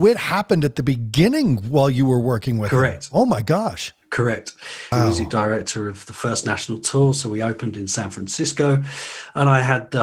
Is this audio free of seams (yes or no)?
no